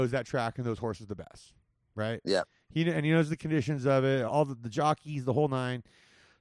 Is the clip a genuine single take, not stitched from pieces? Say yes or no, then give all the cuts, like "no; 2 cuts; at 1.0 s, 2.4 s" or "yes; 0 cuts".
no; 1 cut; at 4.3 s